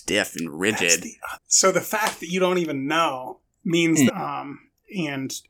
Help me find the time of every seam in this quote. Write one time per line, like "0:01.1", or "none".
0:01.4
0:04.1